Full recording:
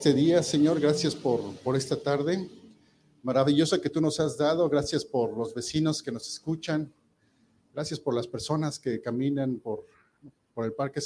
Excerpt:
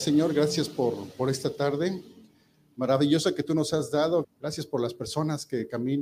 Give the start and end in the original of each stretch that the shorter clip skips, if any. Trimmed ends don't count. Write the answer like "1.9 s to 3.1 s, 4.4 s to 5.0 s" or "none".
4.7 s to 7.6 s

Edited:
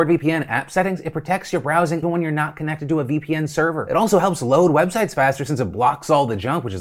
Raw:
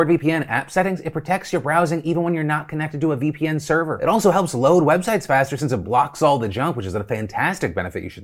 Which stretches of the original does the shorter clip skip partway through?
2.0 s to 2.1 s

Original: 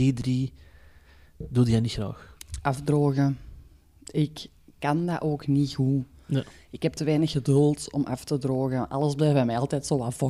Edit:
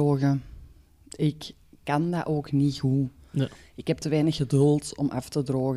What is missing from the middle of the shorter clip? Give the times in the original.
none

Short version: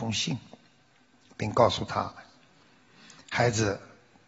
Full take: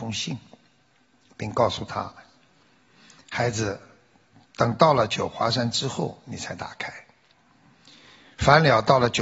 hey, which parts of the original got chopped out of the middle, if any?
none

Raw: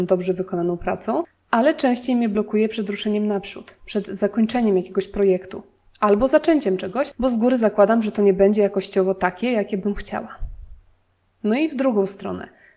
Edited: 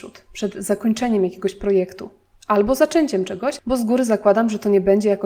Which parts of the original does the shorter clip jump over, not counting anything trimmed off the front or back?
none

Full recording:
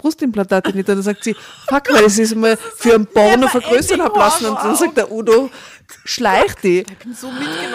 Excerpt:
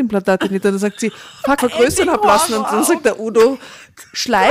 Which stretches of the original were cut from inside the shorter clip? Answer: 1.8 s to 3.5 s

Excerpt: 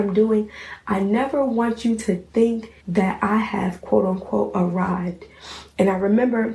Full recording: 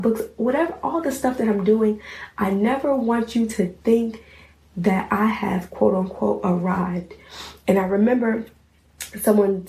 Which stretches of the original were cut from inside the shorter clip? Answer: 4.3 s to 4.7 s

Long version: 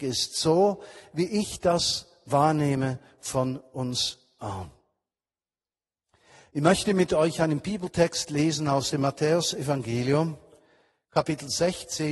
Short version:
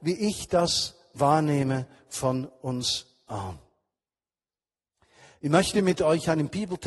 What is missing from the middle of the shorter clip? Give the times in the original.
none

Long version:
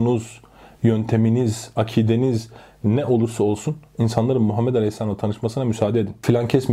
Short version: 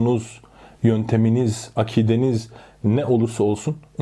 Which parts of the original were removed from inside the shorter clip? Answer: none

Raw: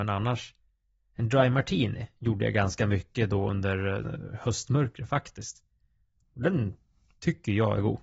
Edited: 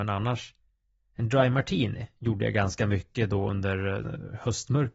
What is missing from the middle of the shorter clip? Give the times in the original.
none

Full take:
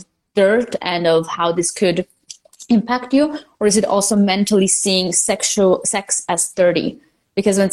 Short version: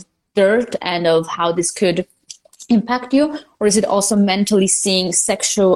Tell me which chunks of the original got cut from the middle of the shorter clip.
none

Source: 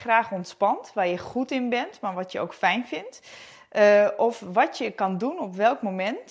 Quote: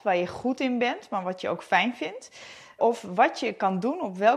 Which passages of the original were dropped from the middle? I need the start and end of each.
3.7 s to 4.2 s

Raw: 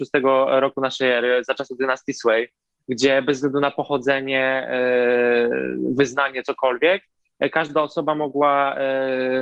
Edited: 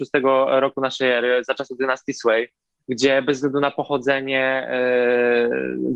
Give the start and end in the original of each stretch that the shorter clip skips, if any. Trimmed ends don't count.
none

